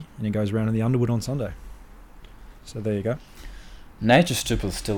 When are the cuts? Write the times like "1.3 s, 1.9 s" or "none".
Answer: 2.6 s